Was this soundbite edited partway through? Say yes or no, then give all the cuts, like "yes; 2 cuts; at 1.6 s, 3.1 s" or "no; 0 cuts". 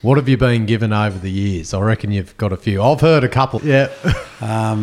yes; 1 cut; at 3.6 s